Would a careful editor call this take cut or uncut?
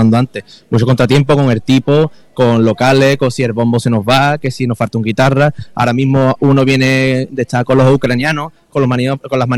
uncut